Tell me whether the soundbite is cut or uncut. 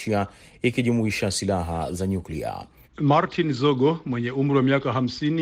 cut